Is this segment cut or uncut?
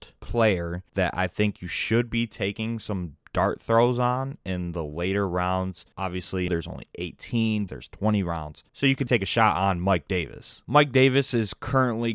cut